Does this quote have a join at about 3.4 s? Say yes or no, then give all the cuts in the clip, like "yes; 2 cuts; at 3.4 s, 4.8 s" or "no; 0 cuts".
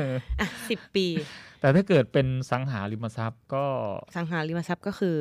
yes; 1 cut; at 3.4 s